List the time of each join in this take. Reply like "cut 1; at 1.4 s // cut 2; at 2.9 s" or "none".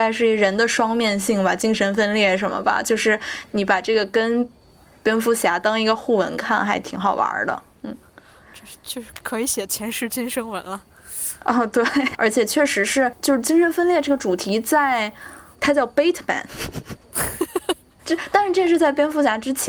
cut 1; at 7.8 s // cut 2; at 15.5 s // cut 3; at 18.0 s